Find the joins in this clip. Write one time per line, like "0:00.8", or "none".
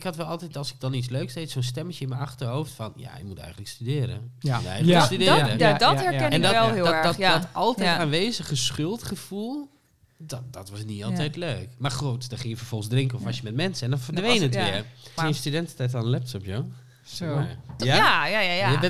0:15.2
0:17.8